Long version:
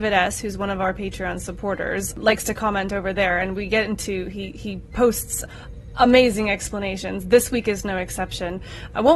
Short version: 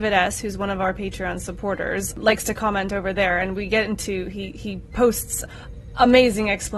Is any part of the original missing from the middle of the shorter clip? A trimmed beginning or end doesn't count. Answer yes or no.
no